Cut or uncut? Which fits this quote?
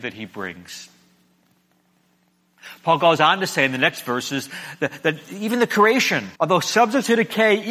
cut